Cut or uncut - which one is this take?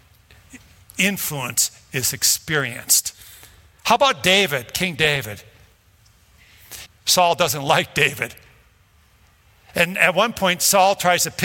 cut